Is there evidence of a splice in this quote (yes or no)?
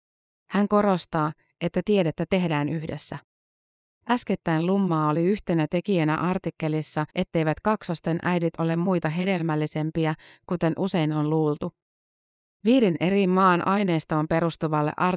yes